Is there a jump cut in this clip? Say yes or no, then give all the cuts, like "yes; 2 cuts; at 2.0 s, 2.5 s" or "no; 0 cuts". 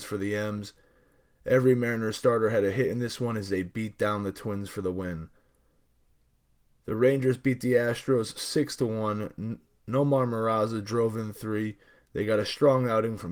no; 0 cuts